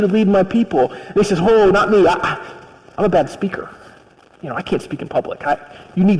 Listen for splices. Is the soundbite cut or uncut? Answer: uncut